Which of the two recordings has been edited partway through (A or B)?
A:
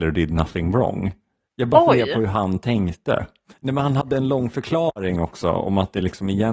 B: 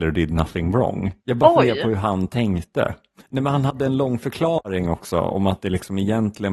B